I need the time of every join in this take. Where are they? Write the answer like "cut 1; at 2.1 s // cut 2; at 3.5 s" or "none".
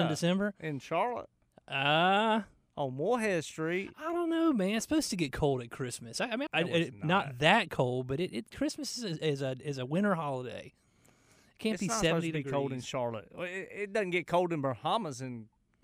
cut 1; at 6.5 s